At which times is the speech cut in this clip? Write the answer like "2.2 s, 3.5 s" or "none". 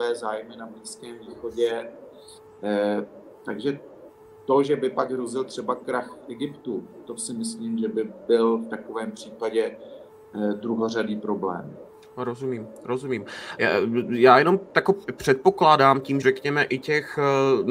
13.6 s, 16.2 s